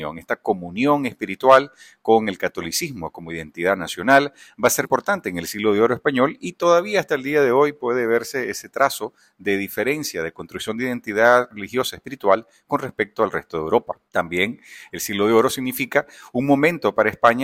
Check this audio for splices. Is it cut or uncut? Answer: cut